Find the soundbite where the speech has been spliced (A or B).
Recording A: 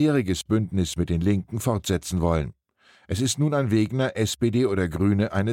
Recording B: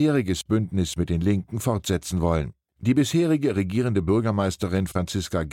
B